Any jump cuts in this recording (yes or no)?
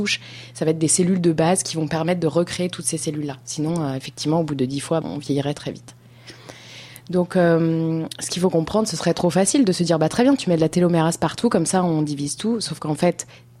yes